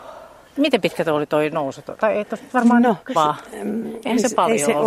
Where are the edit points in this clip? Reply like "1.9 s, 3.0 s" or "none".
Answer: 3.1 s

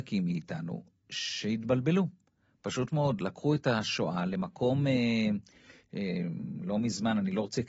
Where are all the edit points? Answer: none

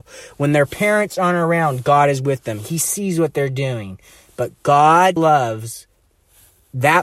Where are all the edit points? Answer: 5.2 s

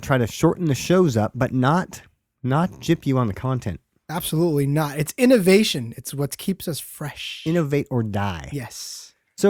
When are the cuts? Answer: none

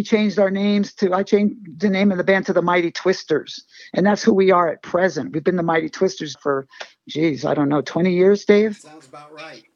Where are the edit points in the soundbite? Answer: 6.3 s

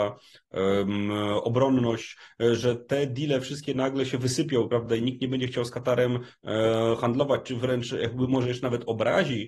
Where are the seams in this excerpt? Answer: none

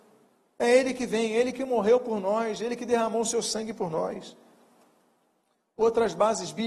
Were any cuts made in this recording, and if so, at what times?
none

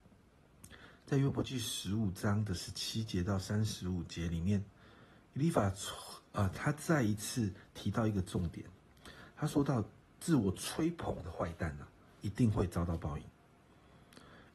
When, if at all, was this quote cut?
none

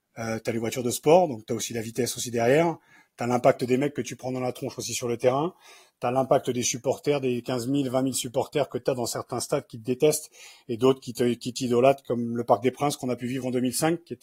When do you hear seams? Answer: none

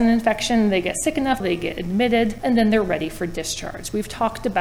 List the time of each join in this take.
1.4 s, 2.4 s

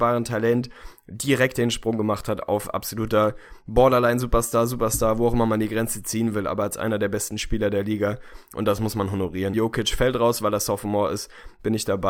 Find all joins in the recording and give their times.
9.5 s

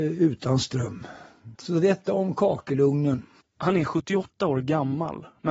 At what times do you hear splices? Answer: 1.6 s, 3.4 s

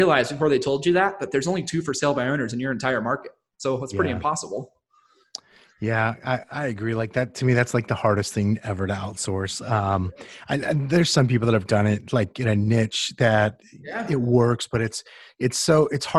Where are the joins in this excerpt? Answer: none

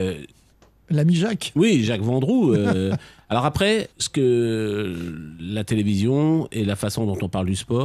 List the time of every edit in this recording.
3.9 s

